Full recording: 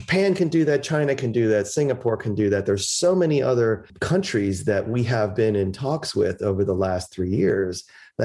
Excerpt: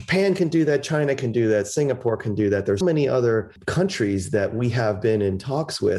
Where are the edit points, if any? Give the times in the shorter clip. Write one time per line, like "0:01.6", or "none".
0:02.8